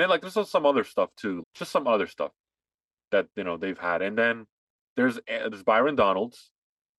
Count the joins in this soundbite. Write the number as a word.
two